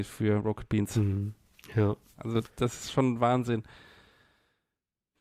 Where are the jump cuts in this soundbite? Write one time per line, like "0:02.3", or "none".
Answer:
none